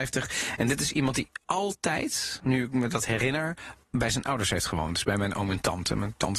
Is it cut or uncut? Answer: cut